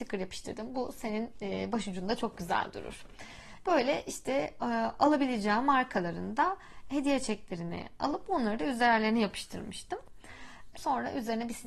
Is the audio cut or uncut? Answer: cut